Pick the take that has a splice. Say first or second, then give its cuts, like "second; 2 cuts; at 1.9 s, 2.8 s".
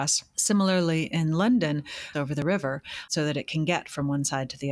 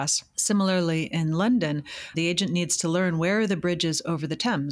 first; 1 cut; at 2.1 s